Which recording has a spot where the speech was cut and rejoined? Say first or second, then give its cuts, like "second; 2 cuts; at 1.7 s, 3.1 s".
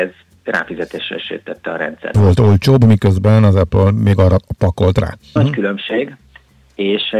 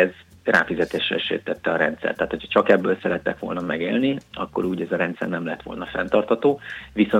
first; 2 cuts; at 2.1 s, 5.4 s